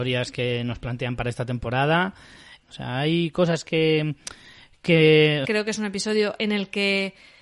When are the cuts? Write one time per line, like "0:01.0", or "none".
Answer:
0:02.6
0:05.4

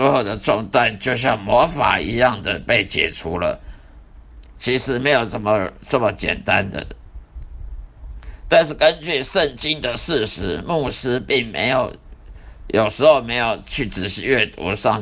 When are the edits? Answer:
none

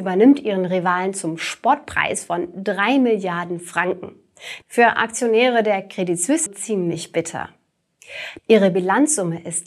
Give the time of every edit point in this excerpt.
0:04.6
0:06.5
0:08.4

